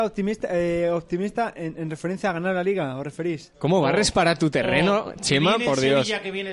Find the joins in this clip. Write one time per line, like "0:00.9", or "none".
0:03.5